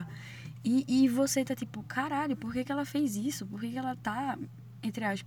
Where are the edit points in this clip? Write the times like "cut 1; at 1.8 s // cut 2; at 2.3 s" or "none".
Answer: none